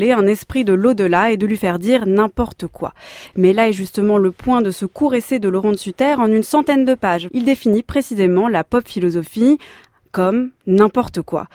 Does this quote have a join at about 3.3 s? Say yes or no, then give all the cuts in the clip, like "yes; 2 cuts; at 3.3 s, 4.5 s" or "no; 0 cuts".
no; 1 cut; at 7.3 s